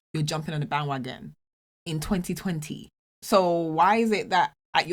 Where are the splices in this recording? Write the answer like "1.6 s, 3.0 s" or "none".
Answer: 3.1 s